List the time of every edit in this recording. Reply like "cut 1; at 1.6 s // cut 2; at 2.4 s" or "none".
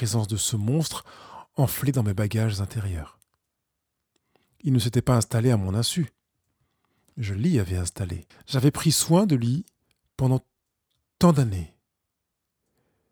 cut 1; at 8.3 s